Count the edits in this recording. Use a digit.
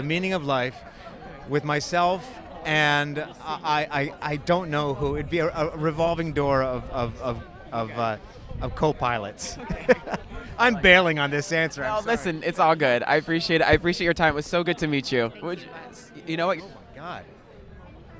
2